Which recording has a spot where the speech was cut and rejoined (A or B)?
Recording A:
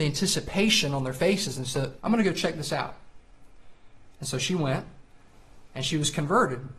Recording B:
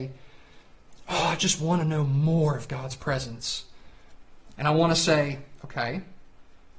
A